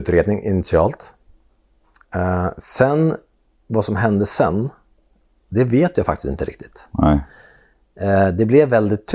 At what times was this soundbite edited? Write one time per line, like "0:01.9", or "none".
none

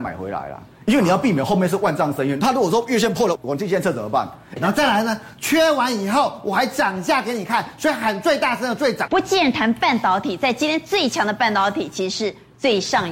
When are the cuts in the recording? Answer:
0:03.3
0:04.6
0:09.1

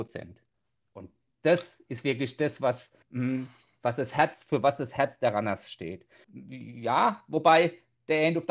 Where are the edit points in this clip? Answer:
0:03.0
0:06.2

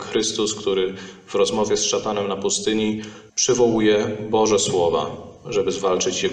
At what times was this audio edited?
0:03.3

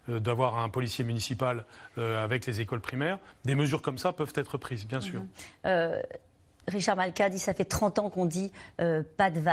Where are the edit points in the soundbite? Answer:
none

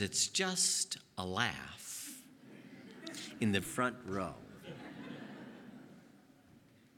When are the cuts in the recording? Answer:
0:03.6

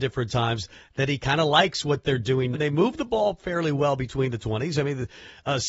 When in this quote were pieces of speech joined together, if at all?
0:02.5

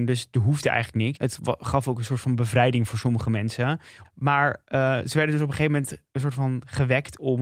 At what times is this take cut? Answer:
0:01.2
0:04.0

